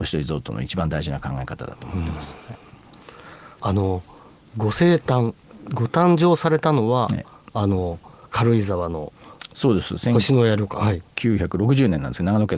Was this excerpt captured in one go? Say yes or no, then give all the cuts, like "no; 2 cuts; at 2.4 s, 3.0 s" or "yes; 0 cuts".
no; 1 cut; at 3.5 s